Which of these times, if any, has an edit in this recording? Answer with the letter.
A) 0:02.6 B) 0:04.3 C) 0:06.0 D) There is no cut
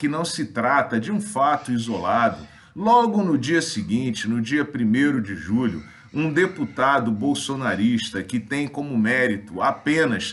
D